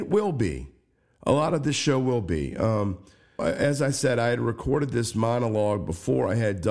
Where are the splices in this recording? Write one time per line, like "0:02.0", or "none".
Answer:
0:03.4